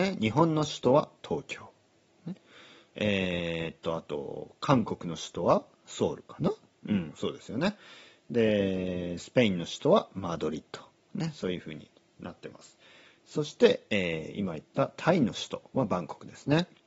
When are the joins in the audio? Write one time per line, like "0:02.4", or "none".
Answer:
none